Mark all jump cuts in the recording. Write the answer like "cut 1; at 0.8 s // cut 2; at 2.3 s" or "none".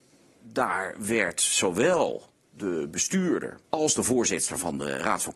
cut 1; at 3.6 s